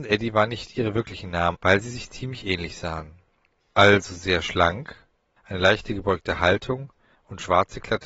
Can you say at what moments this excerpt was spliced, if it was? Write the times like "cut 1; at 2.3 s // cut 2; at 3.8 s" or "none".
cut 1; at 1.5 s // cut 2; at 3.6 s // cut 3; at 5.4 s